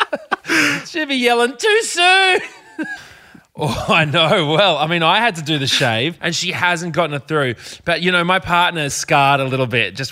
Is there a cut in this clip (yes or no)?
yes